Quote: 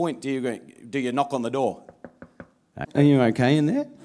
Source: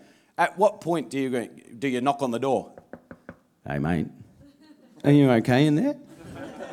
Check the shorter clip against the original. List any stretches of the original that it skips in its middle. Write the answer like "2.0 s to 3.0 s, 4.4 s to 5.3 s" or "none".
3.7 s to 4.9 s